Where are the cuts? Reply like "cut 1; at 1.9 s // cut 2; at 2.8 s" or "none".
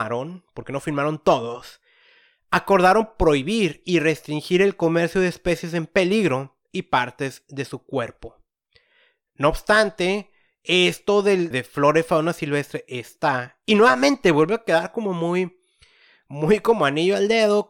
cut 1; at 11.5 s